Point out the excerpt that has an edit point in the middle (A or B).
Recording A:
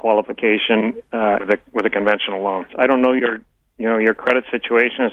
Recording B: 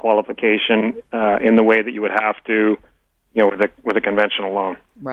A